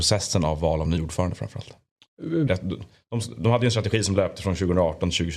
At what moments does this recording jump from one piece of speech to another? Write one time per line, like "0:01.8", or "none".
0:02.5